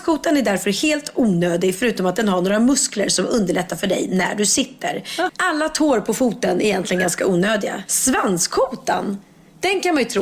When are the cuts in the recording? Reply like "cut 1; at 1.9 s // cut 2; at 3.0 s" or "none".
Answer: cut 1; at 5.3 s // cut 2; at 7.9 s